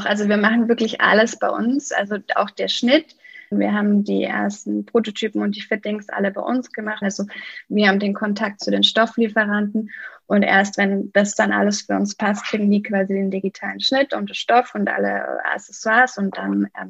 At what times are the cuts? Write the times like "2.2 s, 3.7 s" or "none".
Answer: 3.5 s, 7.0 s